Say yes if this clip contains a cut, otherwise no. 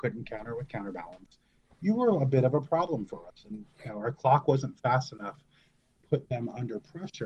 no